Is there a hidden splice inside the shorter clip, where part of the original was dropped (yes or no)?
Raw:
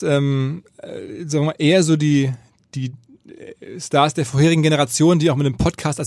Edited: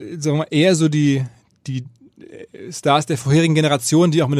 no